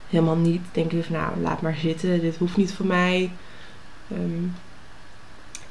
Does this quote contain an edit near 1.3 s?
no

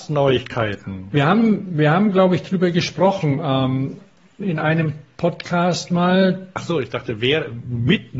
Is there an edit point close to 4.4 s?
yes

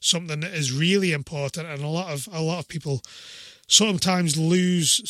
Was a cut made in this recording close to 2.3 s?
no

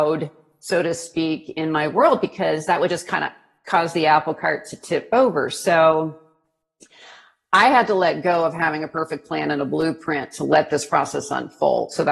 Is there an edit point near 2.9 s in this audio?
no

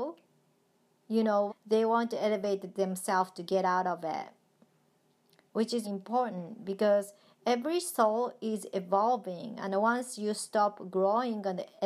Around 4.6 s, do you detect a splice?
no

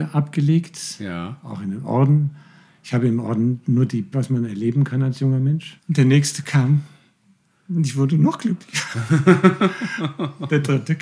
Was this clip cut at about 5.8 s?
yes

